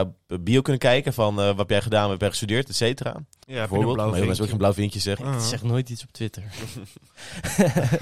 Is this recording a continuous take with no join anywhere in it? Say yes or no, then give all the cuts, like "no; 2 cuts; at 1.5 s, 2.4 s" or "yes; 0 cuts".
no; 2 cuts; at 3.4 s, 5.2 s